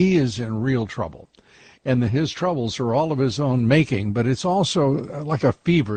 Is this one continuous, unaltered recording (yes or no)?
yes